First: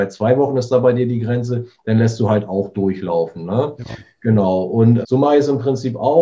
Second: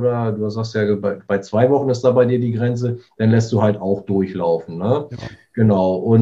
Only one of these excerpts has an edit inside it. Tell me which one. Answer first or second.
first